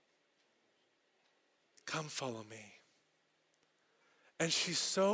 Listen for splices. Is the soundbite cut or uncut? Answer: uncut